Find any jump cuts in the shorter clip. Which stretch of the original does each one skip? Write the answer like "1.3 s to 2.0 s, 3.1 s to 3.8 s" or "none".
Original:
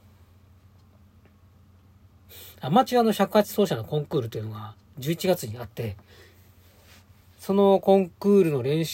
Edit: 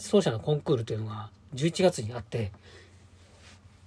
none